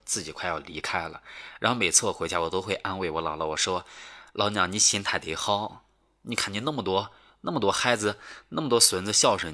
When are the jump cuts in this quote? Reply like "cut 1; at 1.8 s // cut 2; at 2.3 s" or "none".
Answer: none